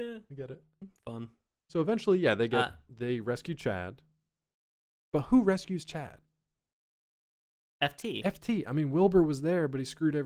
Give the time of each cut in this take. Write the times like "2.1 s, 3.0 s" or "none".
none